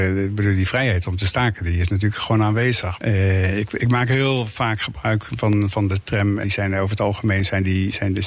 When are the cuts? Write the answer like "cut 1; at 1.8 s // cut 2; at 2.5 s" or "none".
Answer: cut 1; at 3.0 s // cut 2; at 6.4 s